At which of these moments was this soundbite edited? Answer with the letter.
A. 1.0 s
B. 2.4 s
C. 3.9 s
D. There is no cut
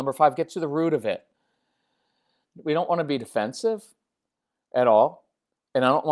B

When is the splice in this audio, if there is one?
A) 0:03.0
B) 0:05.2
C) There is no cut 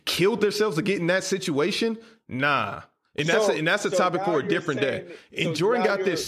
C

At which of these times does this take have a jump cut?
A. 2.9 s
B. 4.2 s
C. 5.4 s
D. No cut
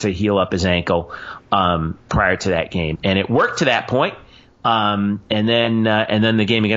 A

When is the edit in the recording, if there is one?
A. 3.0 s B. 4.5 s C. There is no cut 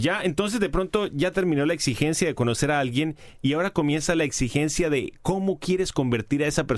C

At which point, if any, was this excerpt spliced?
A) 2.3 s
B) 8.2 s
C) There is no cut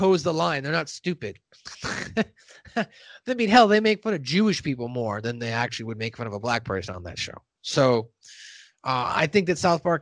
C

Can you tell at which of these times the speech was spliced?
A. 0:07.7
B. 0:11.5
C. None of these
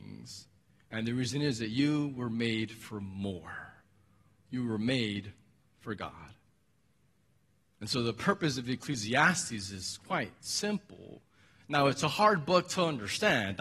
C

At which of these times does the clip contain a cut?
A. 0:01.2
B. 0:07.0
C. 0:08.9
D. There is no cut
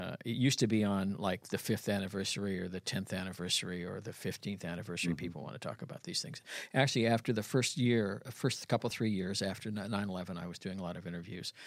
D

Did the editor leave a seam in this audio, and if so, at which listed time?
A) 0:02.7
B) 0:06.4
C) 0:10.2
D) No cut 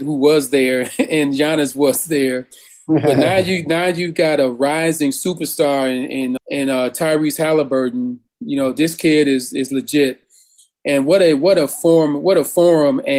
B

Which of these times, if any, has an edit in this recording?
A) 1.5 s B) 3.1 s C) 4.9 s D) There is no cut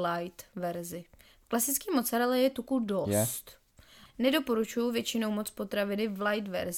D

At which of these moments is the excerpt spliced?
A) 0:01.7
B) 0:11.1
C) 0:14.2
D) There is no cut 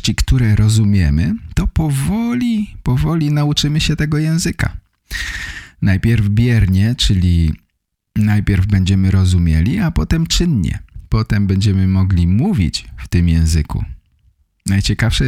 D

